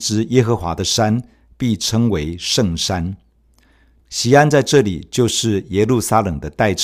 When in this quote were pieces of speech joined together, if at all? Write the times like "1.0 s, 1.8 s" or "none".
4.0 s